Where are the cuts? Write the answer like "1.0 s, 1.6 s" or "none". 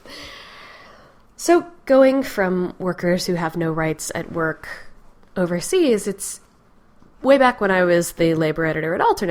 none